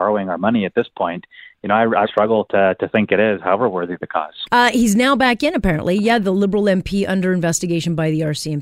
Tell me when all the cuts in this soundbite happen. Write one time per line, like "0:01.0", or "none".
0:02.1
0:04.5